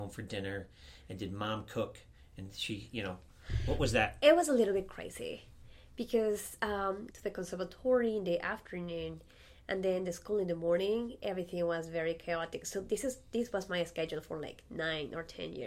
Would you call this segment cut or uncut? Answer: cut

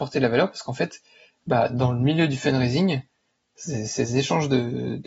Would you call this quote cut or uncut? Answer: uncut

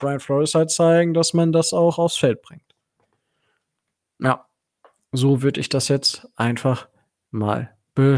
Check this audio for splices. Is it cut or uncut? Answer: uncut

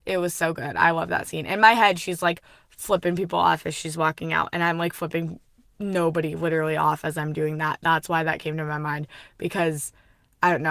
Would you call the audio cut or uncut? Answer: uncut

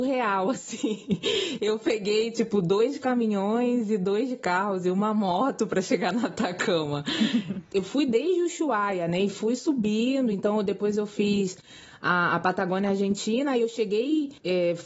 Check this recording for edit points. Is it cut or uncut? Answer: uncut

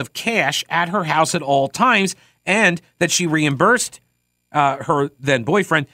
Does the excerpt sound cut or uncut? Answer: uncut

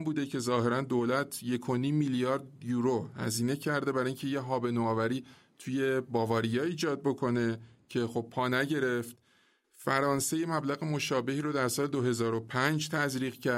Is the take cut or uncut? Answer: uncut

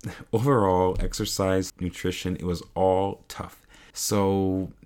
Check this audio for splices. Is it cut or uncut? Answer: cut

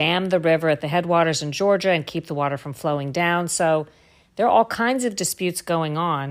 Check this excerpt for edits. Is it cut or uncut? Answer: uncut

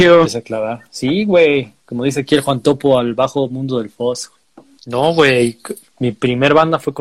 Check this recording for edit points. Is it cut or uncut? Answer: cut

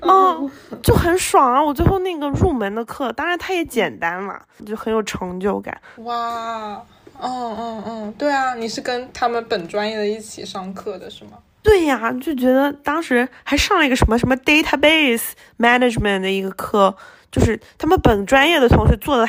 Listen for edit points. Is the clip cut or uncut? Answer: cut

